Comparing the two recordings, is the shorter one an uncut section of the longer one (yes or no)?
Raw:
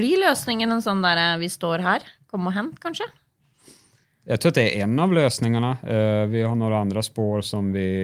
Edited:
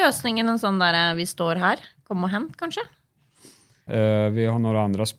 no